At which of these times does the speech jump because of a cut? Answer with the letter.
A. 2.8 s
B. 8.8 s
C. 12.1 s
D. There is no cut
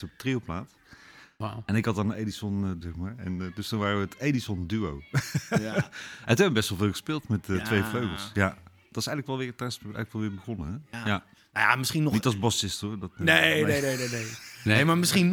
A